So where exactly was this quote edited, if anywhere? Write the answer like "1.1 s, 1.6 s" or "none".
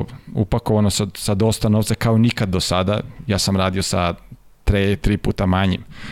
none